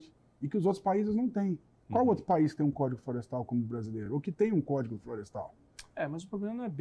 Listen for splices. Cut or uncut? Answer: uncut